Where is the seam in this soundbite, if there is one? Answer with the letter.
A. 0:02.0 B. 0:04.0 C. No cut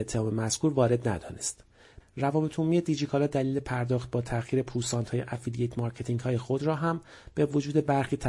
A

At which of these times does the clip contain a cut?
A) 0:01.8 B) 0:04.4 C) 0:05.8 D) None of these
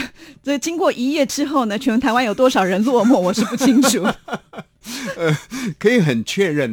D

